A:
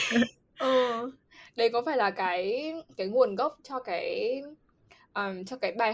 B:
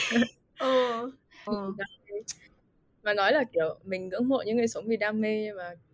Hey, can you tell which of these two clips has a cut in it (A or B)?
B